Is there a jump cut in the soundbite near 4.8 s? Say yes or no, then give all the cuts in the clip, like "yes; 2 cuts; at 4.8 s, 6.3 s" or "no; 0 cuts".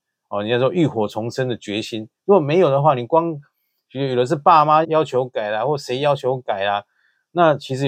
yes; 1 cut; at 4.8 s